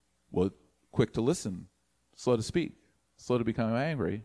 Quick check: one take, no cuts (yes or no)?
yes